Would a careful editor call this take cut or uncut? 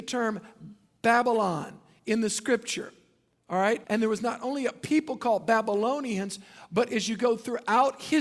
cut